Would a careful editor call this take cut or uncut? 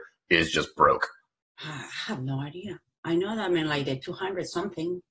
cut